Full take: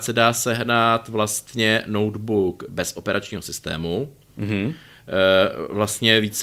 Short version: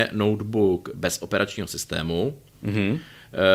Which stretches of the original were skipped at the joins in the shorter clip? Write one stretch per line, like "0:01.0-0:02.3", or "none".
none